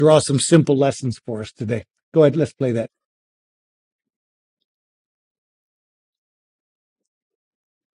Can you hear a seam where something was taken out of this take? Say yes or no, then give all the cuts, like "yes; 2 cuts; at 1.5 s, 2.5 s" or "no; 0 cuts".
no; 0 cuts